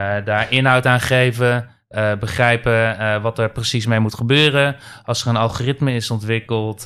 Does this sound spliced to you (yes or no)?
yes